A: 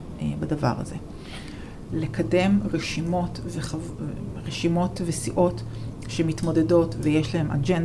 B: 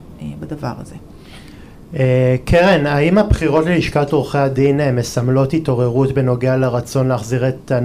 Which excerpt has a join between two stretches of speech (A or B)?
A